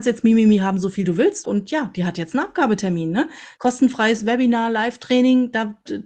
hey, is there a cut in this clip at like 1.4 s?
yes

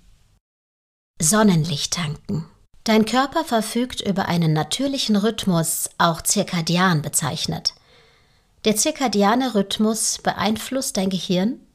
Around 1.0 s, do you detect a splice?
no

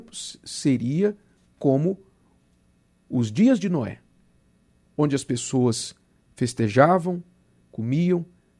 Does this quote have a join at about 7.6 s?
yes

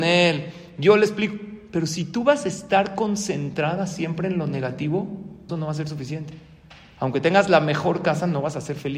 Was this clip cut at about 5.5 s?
yes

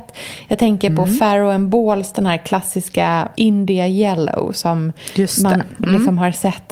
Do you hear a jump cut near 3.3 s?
yes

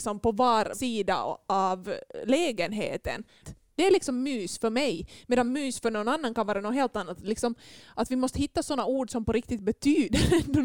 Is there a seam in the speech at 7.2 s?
no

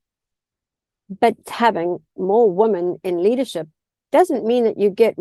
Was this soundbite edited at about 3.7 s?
no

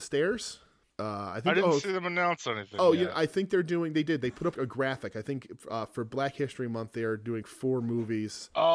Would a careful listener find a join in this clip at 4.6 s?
yes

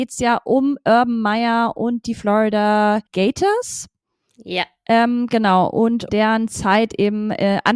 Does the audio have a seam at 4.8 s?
no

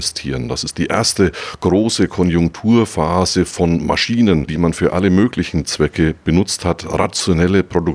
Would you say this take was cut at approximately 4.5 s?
yes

